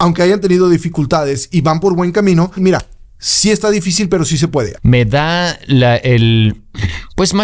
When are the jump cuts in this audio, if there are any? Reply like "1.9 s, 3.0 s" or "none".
2.6 s, 4.8 s

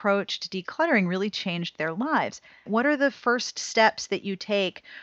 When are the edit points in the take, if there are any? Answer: 2.7 s

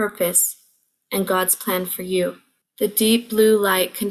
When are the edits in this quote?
2.6 s

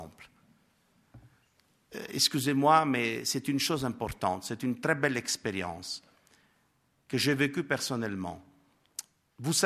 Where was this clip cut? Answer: none

